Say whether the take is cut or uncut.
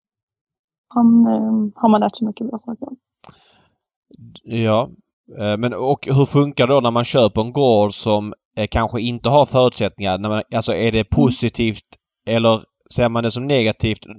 uncut